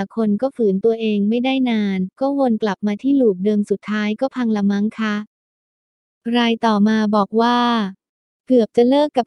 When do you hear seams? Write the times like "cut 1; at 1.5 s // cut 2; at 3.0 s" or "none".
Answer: none